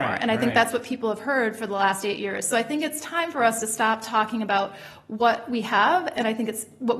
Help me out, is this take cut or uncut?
uncut